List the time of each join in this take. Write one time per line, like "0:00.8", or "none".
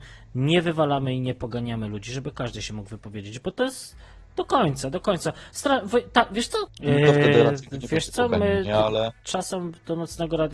0:06.7